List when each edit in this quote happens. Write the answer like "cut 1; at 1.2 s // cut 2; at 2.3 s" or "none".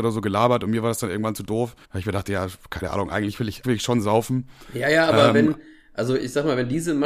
cut 1; at 1.8 s // cut 2; at 3.6 s